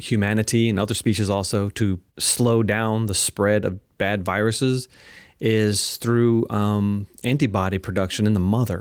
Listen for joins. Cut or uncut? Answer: cut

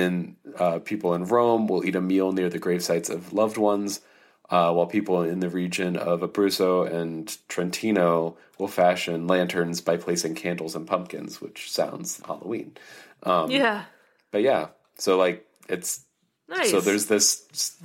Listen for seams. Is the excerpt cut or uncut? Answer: cut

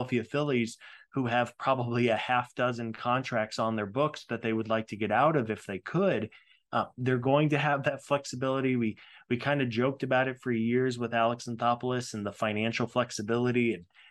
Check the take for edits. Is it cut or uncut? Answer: uncut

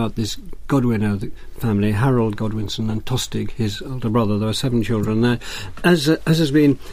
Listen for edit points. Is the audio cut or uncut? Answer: uncut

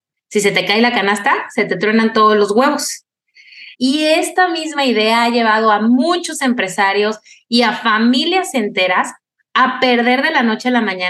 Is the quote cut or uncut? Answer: cut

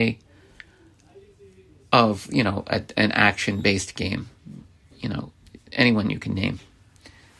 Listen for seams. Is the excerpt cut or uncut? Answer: uncut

